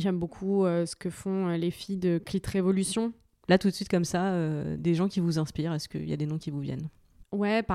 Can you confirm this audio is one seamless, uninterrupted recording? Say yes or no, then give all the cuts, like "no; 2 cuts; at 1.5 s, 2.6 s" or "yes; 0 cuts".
no; 2 cuts; at 3.4 s, 4.8 s